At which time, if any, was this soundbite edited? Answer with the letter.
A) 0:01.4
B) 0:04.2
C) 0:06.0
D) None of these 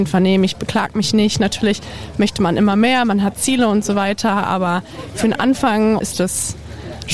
C